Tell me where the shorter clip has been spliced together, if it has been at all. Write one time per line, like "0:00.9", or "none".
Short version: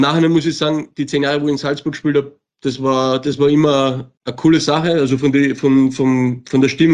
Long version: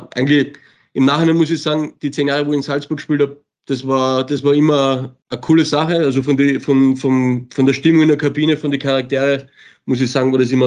none